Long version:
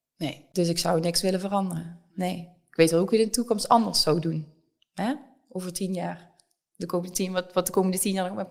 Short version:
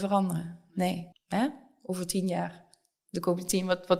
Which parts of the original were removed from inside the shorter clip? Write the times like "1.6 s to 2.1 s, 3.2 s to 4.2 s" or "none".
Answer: 2.5 s to 4.8 s

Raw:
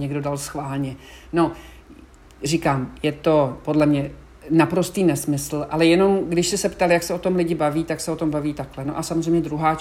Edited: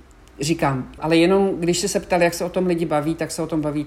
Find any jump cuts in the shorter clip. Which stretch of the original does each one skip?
3.0 s to 5.7 s

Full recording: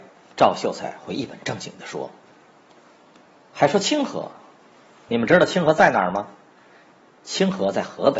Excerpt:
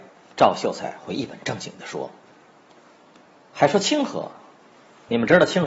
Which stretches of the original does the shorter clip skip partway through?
none

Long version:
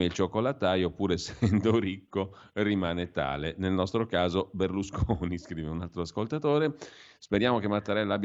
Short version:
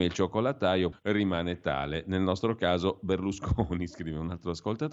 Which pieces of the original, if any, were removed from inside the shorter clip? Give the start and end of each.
0.9 s to 2.4 s

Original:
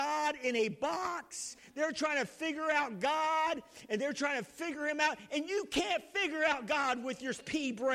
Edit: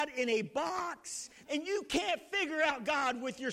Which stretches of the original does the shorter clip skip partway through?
1.7 s to 5.3 s

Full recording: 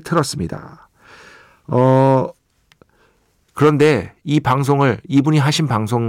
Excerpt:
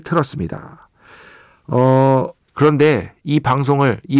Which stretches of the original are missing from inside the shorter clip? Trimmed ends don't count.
2.4 s to 3.4 s

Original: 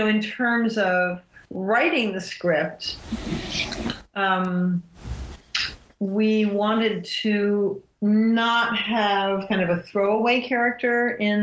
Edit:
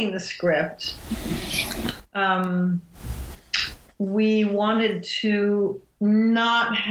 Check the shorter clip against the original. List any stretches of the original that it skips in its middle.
none

